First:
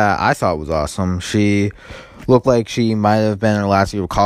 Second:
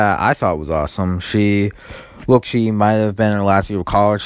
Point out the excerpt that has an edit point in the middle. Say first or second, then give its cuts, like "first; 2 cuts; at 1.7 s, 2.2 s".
second; 1 cut; at 2.4 s